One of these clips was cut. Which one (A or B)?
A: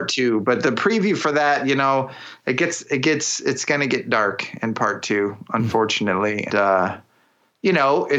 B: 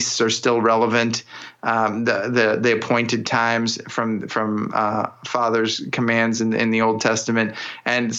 A